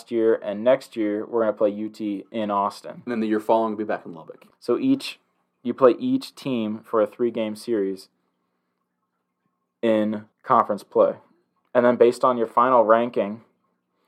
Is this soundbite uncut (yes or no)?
no